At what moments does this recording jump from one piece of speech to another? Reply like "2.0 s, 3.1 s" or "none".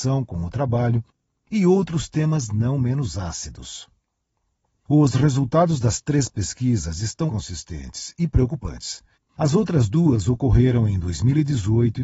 7.3 s, 9.1 s